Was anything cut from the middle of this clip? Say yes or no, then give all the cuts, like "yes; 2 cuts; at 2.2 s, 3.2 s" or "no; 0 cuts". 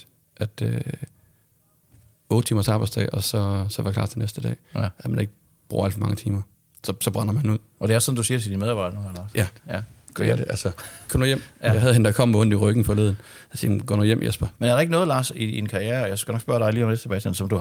yes; 1 cut; at 14.5 s